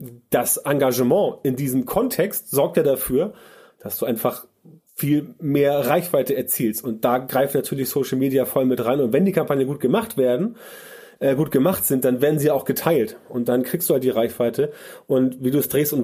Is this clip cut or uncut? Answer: uncut